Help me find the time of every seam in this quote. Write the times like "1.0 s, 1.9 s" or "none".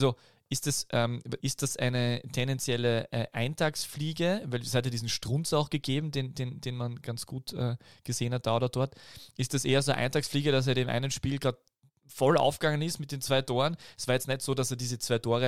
1.4 s